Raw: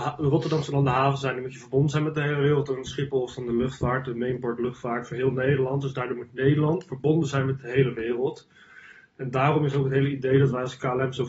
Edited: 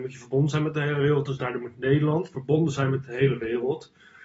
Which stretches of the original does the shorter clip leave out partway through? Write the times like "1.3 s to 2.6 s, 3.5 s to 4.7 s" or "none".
2.7 s to 5.8 s